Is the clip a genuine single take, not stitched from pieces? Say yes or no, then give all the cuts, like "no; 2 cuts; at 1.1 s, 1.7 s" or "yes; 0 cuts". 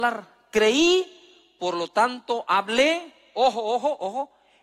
yes; 0 cuts